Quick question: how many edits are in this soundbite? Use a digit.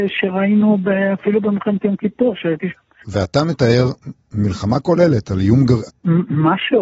2